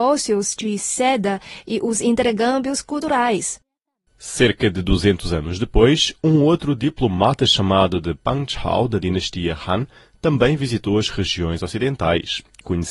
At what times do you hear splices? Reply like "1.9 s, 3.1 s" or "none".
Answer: none

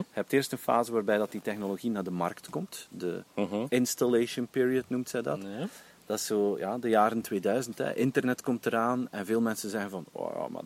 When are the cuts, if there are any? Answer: none

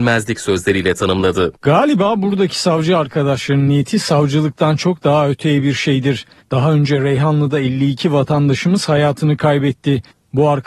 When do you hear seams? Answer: 6.4 s

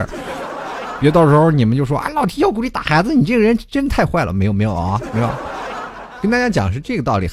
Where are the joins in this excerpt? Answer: none

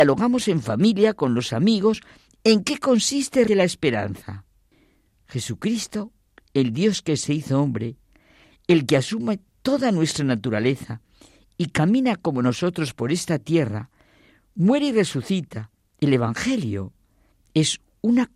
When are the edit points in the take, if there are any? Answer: 3.5 s, 16.0 s

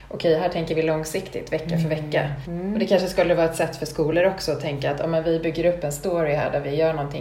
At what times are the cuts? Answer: 2.4 s

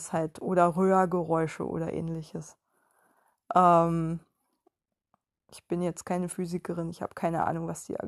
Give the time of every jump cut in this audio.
none

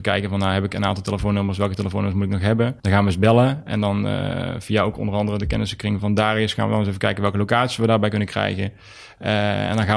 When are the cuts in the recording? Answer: 2.8 s, 6.0 s

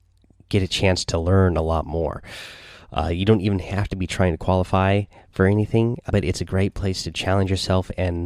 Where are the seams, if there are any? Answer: 6.1 s

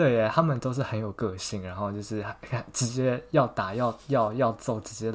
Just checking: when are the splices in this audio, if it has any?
none

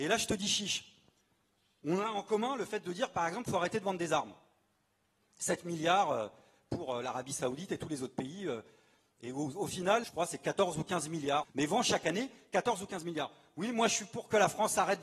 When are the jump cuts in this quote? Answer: 10.0 s, 11.4 s

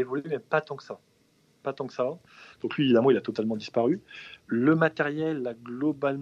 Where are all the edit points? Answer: 2.5 s, 4.5 s

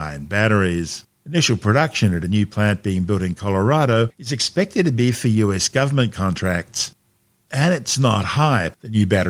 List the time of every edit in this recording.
1.2 s, 7.4 s

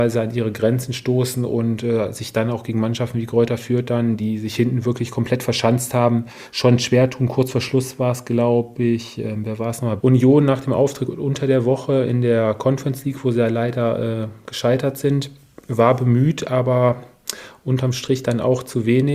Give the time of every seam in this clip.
10.0 s

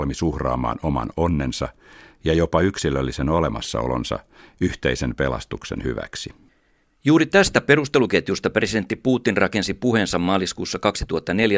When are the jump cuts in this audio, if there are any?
none

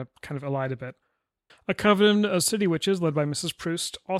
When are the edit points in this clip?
1.5 s

